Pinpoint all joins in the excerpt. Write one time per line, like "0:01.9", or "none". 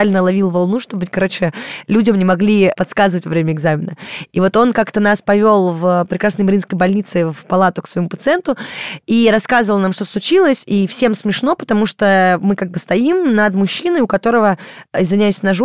none